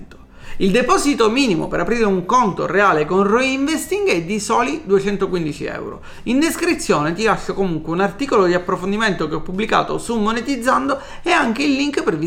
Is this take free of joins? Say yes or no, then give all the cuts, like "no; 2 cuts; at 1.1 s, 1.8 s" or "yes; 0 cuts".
yes; 0 cuts